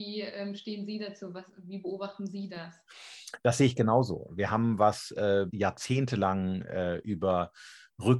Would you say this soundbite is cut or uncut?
cut